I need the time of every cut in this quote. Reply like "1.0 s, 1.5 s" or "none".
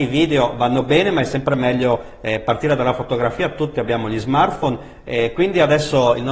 none